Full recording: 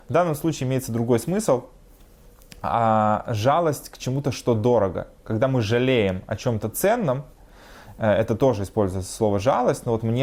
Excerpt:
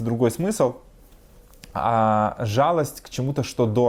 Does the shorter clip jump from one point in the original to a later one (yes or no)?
no